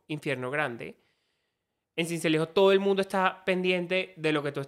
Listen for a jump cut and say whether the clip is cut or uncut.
uncut